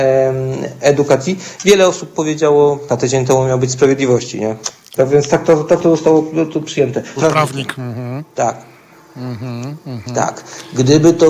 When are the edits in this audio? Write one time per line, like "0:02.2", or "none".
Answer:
0:02.9
0:05.0
0:07.2